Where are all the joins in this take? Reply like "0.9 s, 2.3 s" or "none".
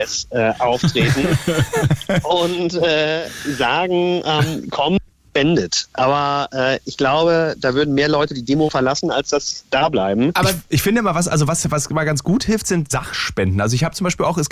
none